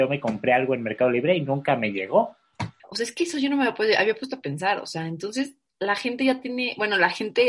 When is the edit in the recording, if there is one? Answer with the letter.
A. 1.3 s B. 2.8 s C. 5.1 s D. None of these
B